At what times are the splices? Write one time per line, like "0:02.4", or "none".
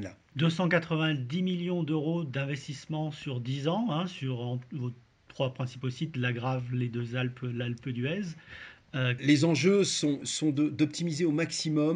0:09.2
0:10.2